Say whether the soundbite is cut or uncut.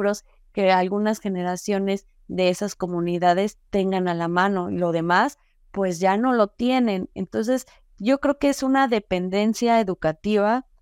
uncut